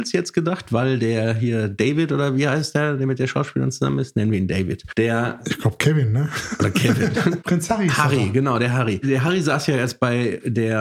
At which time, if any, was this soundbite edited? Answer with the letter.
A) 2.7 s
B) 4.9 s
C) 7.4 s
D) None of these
C